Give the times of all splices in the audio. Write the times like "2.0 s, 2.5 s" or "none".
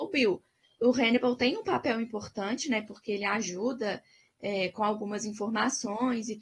none